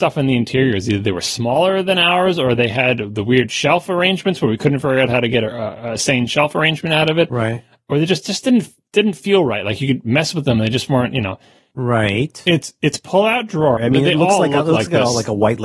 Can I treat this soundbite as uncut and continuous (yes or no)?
no